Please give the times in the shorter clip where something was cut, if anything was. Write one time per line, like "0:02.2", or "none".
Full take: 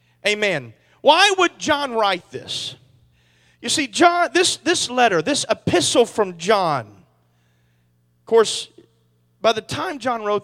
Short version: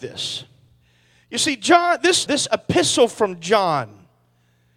0:02.3